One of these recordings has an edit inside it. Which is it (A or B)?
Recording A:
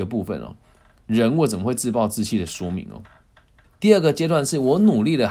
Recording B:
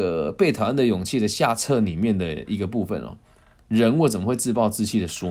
A